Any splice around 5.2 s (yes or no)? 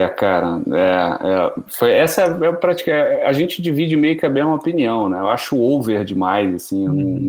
no